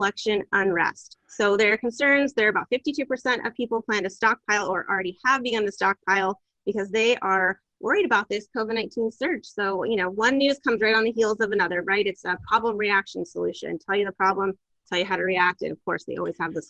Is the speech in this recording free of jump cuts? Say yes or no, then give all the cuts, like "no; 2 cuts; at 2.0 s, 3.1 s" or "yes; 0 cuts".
yes; 0 cuts